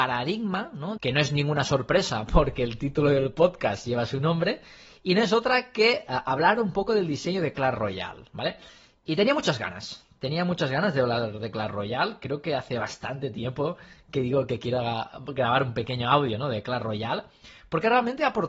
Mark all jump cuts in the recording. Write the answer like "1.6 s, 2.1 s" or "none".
1.0 s